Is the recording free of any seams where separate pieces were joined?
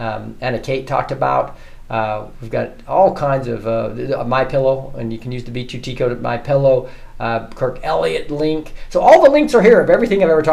yes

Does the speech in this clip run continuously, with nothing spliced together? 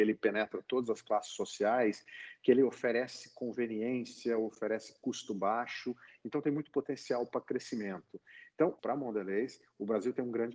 no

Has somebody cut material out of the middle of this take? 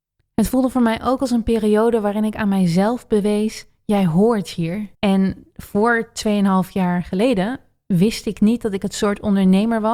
yes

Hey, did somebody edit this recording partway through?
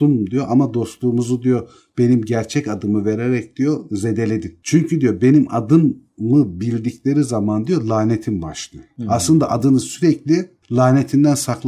no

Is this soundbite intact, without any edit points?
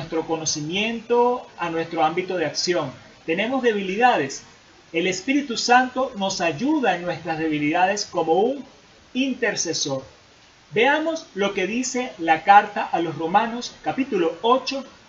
yes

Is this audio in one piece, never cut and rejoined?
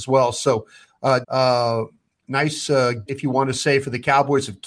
no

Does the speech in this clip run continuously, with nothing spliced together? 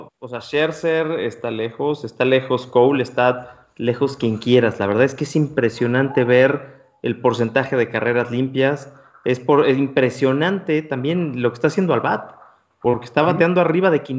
yes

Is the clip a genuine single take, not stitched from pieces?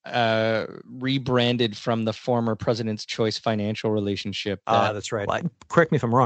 no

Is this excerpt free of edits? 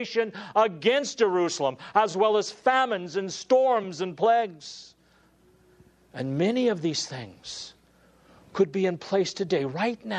yes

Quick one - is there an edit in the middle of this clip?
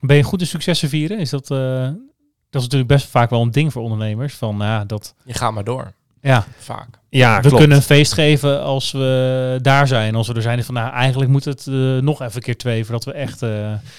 no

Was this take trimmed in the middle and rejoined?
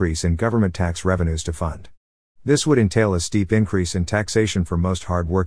no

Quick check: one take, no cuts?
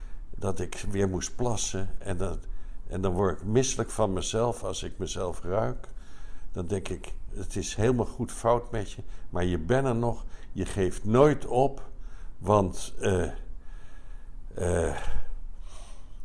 yes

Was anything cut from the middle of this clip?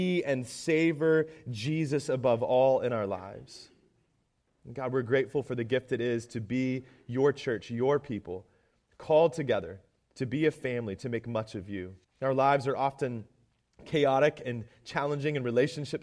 yes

